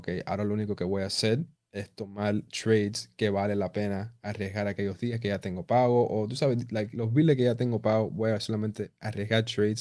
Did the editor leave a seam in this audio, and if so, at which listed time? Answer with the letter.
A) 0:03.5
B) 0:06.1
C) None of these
C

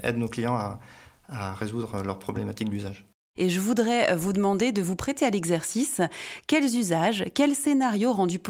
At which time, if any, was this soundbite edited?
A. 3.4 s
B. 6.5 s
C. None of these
A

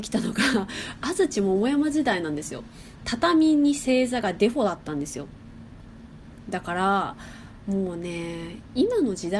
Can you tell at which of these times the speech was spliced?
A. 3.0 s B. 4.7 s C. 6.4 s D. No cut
A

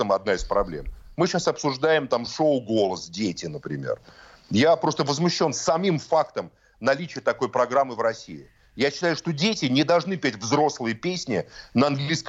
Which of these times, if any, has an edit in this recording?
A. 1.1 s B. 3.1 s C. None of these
A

